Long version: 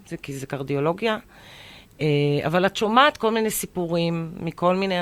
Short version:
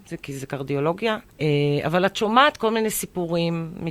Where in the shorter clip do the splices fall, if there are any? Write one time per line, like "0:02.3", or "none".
0:01.3